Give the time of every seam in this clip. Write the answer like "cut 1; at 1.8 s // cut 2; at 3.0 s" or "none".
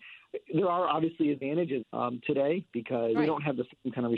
cut 1; at 1.8 s // cut 2; at 3.1 s